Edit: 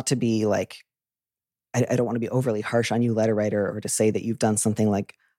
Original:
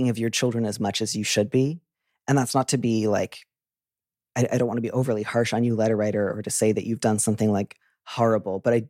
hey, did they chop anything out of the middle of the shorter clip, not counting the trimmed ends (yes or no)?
no